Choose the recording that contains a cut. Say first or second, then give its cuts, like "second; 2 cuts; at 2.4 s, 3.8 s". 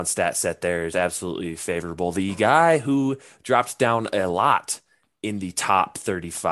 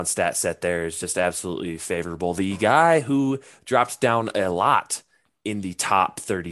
first; 1 cut; at 0.9 s